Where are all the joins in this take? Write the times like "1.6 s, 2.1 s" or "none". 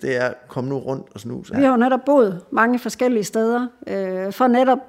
1.5 s